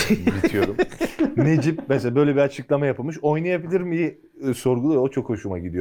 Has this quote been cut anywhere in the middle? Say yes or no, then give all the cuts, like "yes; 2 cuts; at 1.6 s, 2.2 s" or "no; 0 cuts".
no; 0 cuts